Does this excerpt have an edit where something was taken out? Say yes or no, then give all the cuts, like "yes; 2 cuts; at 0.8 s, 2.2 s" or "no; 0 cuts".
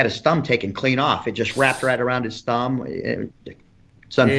yes; 1 cut; at 3.3 s